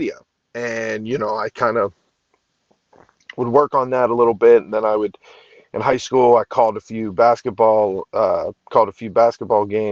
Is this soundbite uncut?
yes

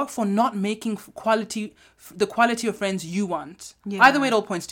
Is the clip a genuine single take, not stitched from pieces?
yes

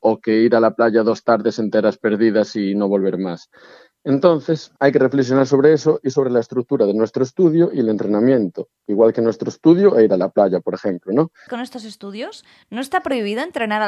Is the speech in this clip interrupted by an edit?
yes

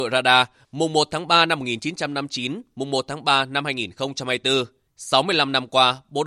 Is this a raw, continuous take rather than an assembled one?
yes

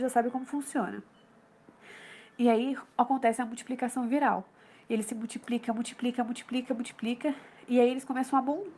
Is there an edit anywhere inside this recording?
no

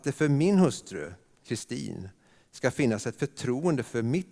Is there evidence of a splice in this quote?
no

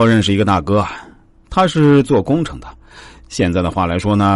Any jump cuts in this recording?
no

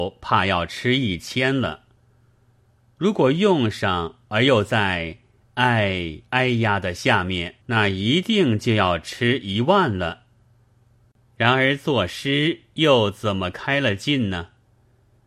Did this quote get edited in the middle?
yes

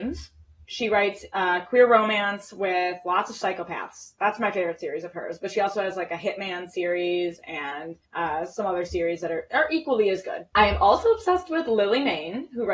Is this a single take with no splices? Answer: no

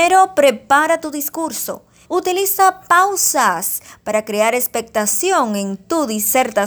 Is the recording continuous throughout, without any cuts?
no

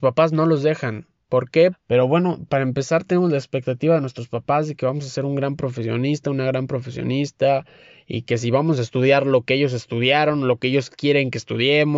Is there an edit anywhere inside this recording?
yes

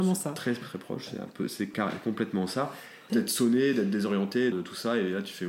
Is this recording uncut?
no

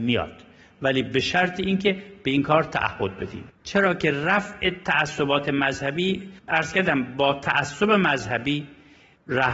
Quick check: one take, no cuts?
no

